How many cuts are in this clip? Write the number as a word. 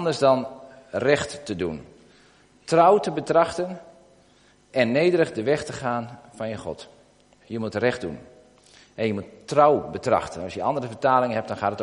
one